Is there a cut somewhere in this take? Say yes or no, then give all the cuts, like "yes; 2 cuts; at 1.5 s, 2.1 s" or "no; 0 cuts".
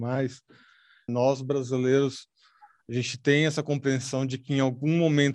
yes; 1 cut; at 1.1 s